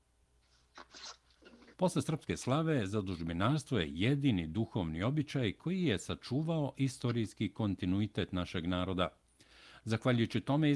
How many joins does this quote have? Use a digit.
1